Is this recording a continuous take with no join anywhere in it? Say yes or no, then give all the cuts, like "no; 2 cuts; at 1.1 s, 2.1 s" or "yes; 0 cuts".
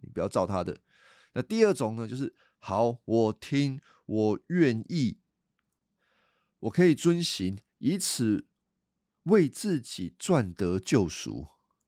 yes; 0 cuts